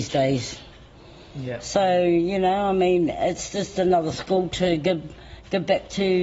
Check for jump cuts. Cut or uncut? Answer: uncut